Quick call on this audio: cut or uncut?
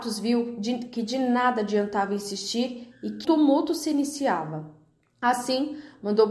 cut